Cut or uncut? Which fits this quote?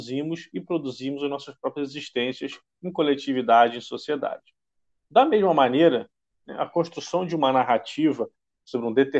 uncut